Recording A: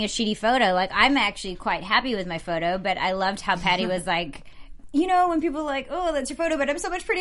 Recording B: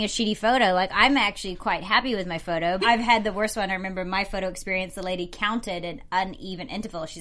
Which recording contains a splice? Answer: B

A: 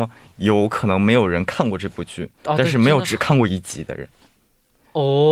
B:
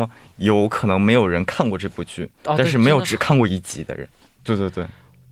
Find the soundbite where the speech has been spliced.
B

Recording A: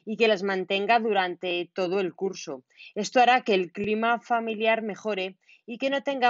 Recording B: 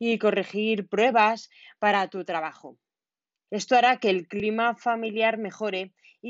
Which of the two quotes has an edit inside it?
B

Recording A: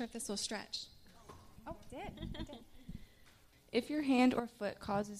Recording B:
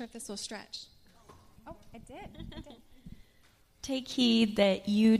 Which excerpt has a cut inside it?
A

